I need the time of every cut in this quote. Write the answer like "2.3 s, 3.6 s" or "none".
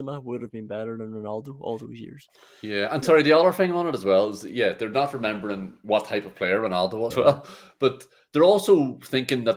7.1 s